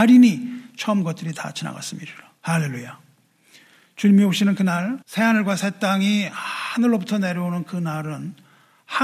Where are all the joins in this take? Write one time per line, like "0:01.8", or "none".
0:02.4
0:05.0